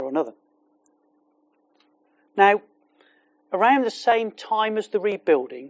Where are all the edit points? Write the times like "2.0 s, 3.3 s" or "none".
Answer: 2.3 s

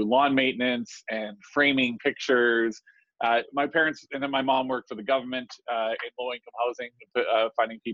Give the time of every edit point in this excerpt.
none

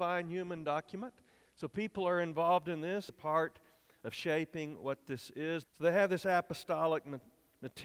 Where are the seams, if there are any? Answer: 3.1 s, 5.6 s

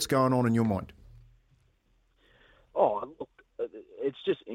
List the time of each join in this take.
none

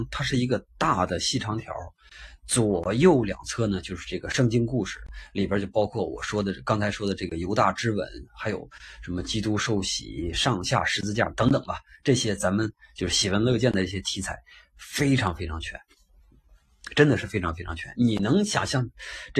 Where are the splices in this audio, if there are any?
11.3 s

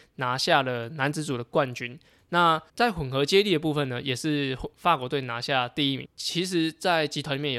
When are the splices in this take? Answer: 2.7 s, 6.1 s

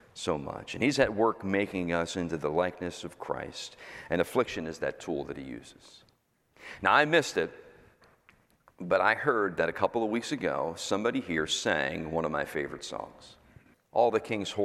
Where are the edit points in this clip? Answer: 13.7 s

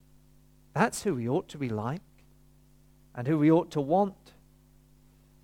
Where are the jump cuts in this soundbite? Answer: none

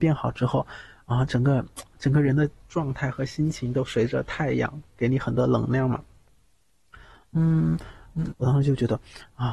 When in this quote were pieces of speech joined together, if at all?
8.3 s

